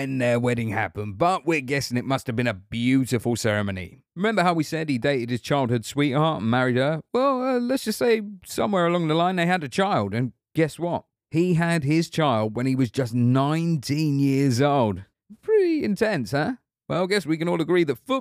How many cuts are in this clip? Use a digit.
1